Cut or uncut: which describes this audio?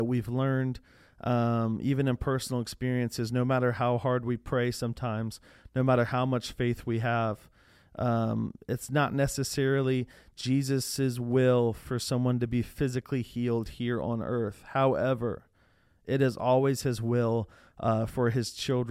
uncut